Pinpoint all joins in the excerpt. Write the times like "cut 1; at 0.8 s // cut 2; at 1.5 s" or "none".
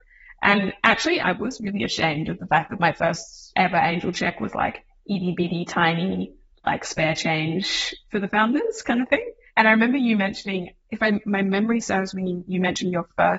cut 1; at 1.2 s